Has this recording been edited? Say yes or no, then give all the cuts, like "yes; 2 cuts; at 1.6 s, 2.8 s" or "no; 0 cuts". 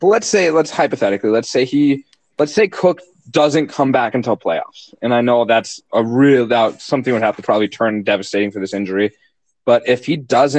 no; 0 cuts